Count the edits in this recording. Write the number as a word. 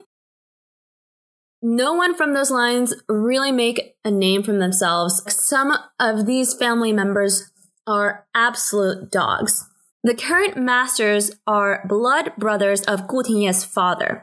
two